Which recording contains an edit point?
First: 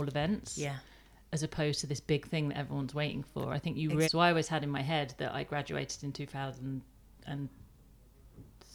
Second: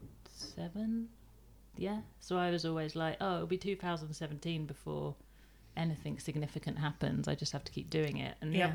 first; 1 cut; at 4.0 s

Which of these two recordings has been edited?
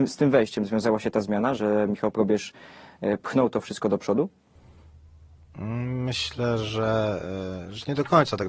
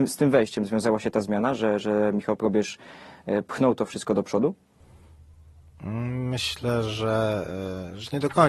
first; 1 cut; at 1.6 s

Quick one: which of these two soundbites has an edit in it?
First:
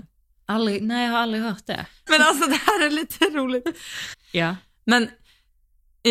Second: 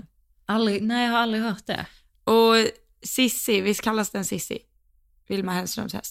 first; 2 cuts; at 2.1 s, 4.1 s

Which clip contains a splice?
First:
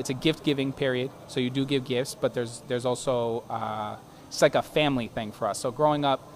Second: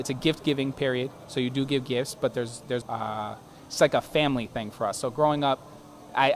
second; 1 cut; at 2.8 s

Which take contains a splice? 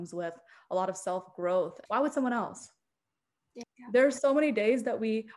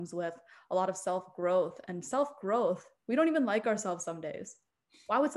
first; 2 cuts; at 1.9 s, 3.6 s

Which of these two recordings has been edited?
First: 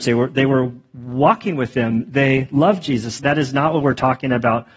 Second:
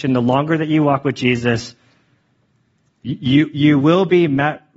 first; 1 cut; at 3.2 s

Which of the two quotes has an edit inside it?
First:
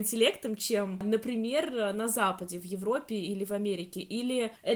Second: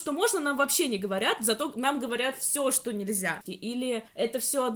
second; 1 cut; at 3.5 s

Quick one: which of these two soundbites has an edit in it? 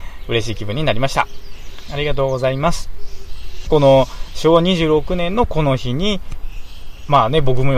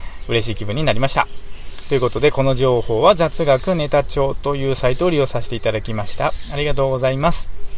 first; 2 cuts; at 1.9 s, 3.7 s

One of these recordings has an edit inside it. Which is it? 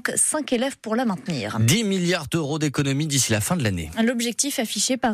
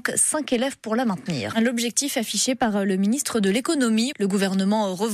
second; 2 cuts; at 1.5 s, 4.1 s

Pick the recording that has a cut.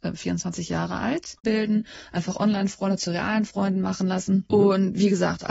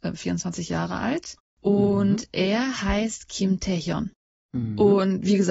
first; 2 cuts; at 1.4 s, 4.5 s

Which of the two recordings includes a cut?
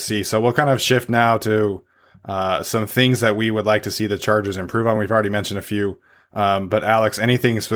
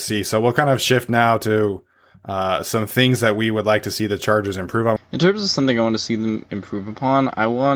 second; 1 cut; at 5.0 s

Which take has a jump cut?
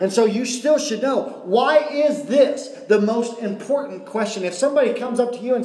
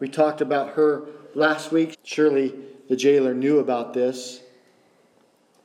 second; 1 cut; at 1.9 s

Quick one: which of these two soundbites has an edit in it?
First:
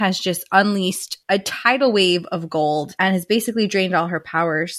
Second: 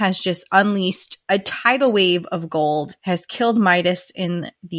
first; 1 cut; at 3.0 s

